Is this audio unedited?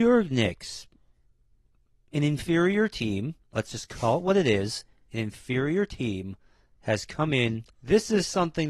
no; 1 cut; at 7.7 s

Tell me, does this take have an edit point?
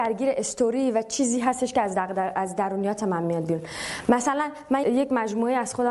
yes; 1 cut; at 4.8 s

